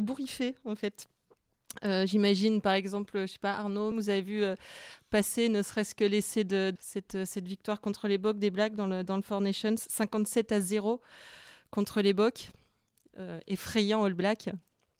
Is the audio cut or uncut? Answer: cut